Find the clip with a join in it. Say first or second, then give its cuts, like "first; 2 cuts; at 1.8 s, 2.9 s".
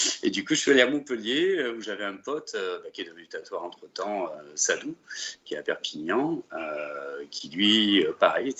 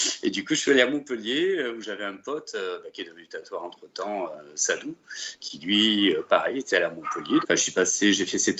second; 2 cuts; at 5.4 s, 7.4 s